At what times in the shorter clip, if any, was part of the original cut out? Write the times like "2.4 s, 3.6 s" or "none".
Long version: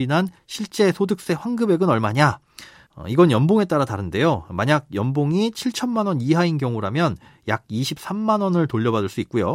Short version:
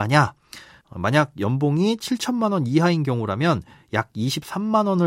0.9 s